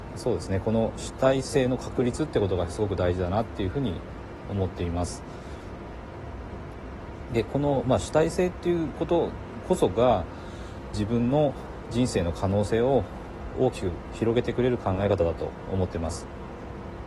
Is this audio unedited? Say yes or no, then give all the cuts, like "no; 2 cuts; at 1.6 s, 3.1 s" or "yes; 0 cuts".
yes; 0 cuts